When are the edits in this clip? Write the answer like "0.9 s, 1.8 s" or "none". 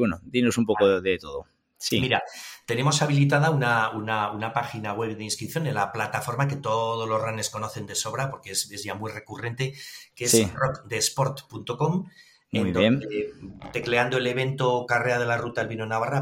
none